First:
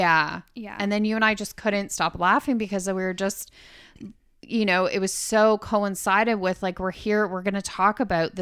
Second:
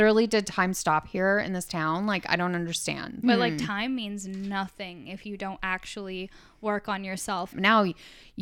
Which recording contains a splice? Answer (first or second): second